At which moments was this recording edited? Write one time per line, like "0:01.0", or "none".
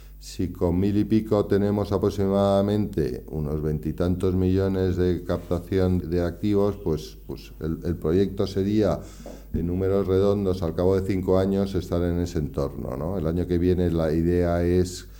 0:06.0